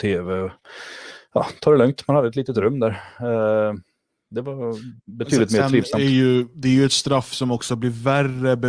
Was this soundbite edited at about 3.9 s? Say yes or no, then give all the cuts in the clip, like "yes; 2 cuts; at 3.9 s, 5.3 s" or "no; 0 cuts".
no; 0 cuts